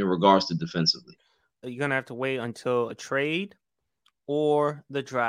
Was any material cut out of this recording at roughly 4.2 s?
no; 1 cut; at 1.6 s

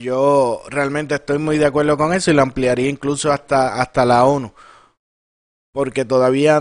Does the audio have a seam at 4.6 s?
no; 0 cuts

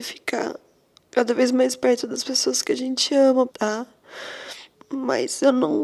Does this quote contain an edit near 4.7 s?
yes; 2 cuts; at 3.5 s, 4.7 s

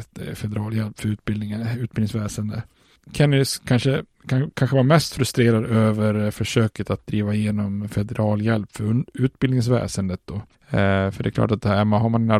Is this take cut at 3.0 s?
yes; 1 cut; at 3.0 s

